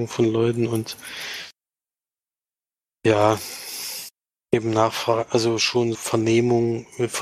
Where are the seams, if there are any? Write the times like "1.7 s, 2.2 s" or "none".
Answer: 5.9 s